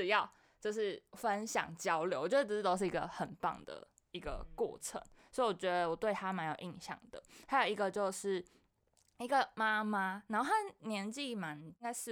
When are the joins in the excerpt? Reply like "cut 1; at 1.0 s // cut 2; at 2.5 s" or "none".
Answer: none